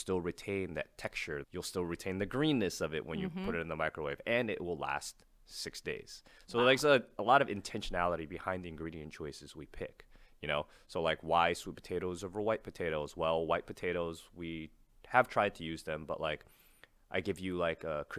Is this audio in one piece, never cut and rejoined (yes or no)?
no